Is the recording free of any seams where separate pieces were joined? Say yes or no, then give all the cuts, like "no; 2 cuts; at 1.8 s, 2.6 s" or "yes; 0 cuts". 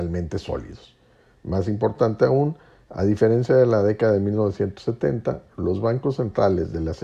yes; 0 cuts